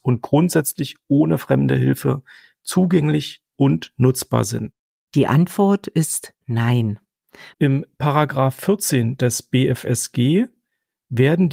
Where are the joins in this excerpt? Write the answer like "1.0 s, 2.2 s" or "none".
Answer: 5.1 s, 7.5 s